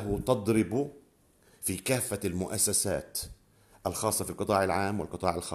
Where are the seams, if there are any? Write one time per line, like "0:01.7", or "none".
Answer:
none